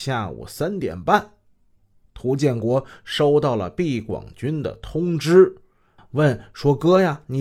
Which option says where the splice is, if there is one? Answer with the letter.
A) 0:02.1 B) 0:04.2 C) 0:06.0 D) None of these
C